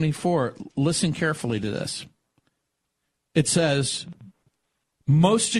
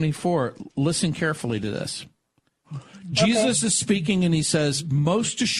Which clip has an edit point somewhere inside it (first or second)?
second